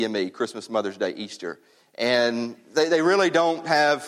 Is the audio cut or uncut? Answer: uncut